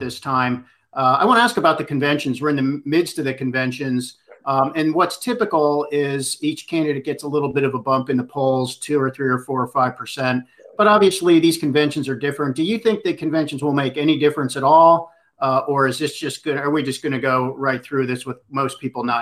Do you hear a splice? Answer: no; 0 cuts

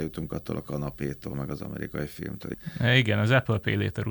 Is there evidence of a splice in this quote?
no; 0 cuts

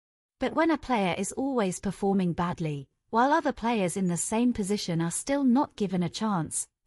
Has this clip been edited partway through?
no; 0 cuts

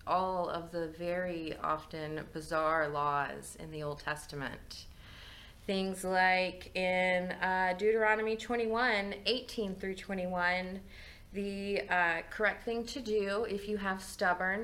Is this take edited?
no; 0 cuts

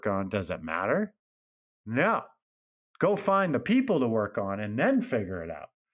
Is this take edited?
no; 0 cuts

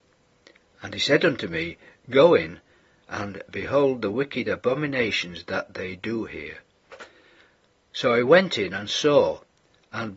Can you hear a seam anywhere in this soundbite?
no; 0 cuts

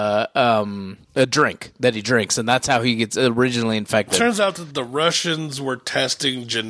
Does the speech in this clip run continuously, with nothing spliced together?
no; 1 cut; at 1.0 s

